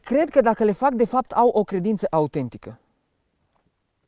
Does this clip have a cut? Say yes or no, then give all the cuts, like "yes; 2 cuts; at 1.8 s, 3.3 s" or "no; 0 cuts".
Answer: no; 0 cuts